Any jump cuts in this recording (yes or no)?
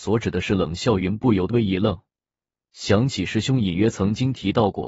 yes